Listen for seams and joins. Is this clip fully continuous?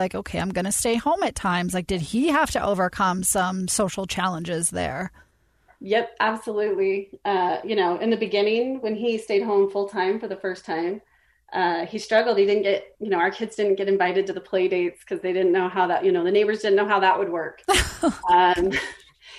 yes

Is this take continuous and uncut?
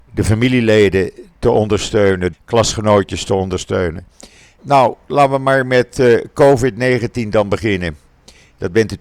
no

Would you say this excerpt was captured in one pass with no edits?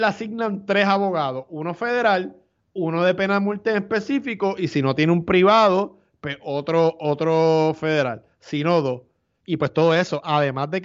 no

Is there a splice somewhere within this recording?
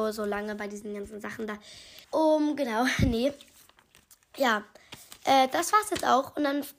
yes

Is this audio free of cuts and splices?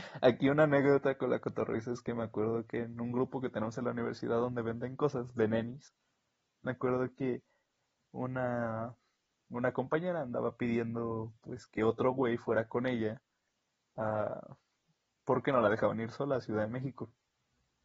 yes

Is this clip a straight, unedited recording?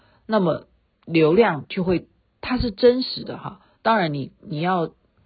yes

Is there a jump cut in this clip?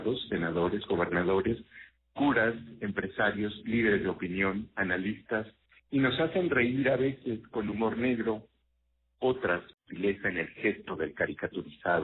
no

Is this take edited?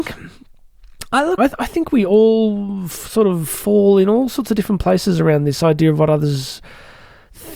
yes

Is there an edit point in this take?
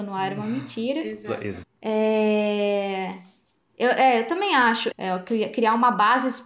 yes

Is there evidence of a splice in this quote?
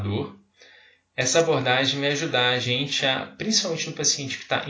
no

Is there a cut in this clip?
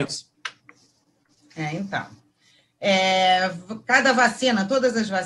no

